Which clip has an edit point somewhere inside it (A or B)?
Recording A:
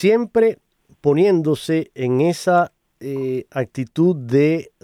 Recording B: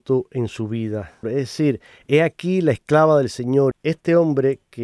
B